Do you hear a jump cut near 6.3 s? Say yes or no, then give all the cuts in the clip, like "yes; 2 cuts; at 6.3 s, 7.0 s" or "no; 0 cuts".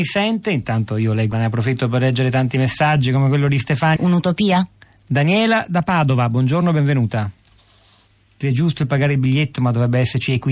no; 3 cuts; at 1.3 s, 4.0 s, 8.4 s